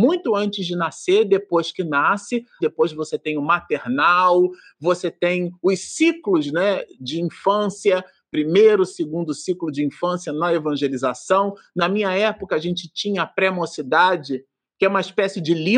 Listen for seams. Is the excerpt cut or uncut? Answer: cut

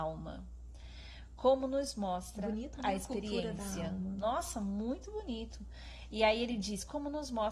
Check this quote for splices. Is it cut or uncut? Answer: uncut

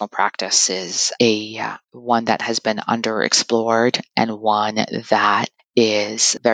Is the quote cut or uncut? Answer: cut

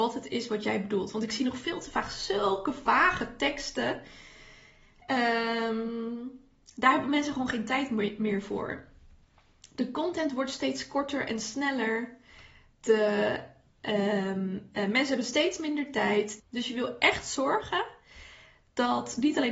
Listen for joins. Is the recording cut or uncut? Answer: cut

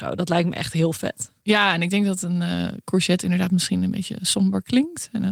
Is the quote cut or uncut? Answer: uncut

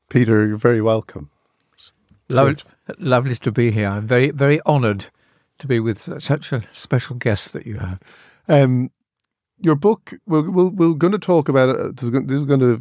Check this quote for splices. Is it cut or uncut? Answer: uncut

